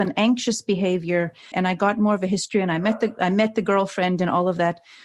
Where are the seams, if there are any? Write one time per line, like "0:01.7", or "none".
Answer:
0:01.5